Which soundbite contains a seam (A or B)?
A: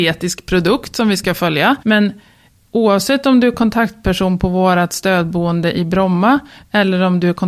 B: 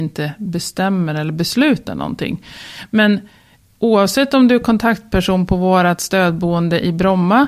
A